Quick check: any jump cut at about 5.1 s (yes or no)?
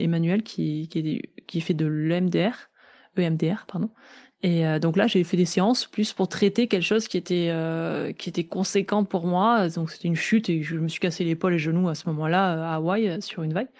no